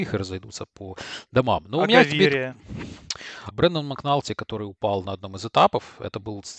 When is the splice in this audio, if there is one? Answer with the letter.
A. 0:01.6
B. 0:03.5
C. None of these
B